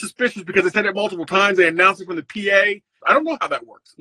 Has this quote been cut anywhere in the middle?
yes; 1 cut; at 3.0 s

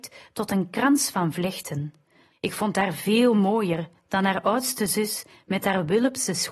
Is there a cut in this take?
yes; 1 cut; at 2.3 s

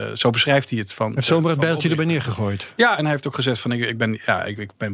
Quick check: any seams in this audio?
no; 0 cuts

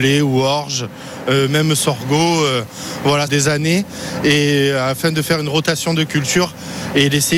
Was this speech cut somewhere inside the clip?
yes; 1 cut; at 3.3 s

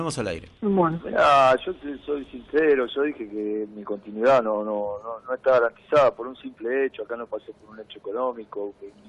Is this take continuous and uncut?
yes; 0 cuts

